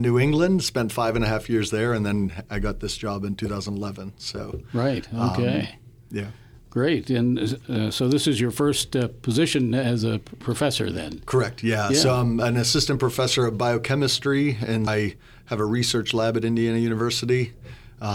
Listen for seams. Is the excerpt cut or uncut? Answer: cut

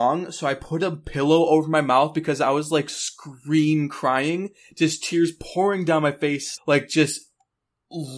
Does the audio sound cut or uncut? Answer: cut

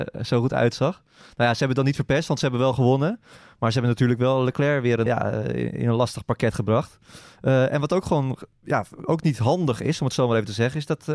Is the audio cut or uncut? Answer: cut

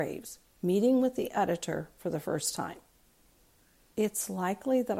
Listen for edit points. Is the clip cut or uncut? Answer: cut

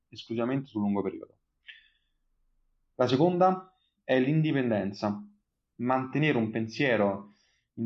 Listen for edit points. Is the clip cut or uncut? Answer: uncut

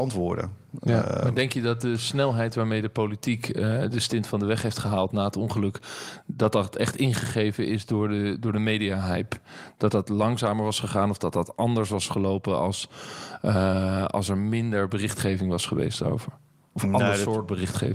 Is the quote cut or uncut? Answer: uncut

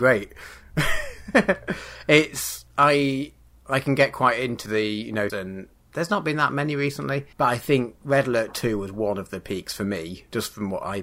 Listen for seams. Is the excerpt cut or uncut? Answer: cut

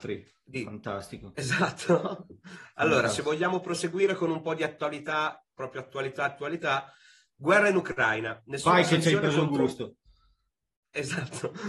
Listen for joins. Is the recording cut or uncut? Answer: uncut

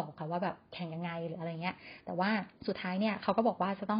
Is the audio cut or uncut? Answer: cut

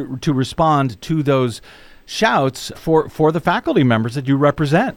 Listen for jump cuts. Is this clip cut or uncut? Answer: cut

